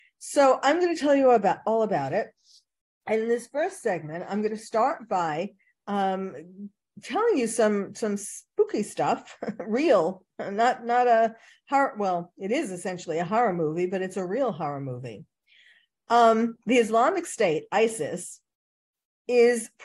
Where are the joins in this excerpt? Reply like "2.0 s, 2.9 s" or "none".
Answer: none